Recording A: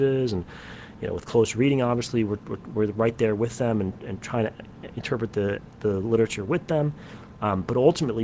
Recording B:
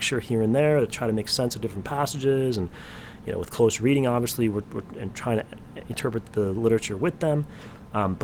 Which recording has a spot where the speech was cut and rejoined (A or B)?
B